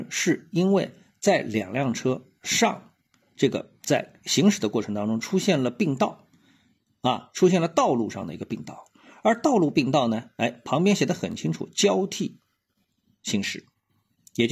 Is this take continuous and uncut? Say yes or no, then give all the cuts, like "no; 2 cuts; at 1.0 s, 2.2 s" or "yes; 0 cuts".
yes; 0 cuts